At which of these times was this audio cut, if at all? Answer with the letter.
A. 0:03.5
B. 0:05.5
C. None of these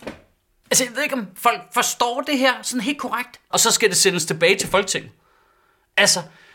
A